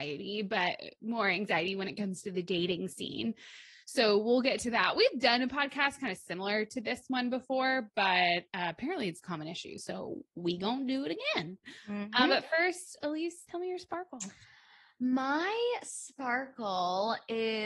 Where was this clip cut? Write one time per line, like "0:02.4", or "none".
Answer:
0:13.4